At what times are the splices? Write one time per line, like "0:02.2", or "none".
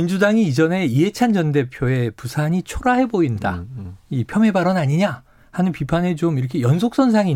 none